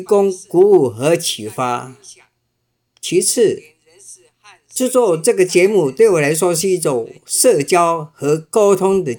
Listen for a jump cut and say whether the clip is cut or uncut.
uncut